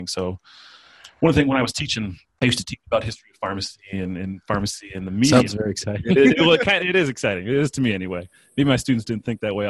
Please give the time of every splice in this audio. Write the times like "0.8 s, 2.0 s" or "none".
none